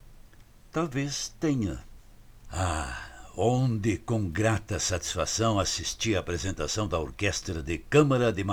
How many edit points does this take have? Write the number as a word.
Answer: one